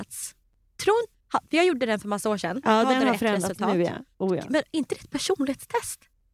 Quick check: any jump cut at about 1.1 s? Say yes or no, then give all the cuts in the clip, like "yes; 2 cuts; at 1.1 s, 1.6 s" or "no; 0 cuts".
yes; 1 cut; at 1.1 s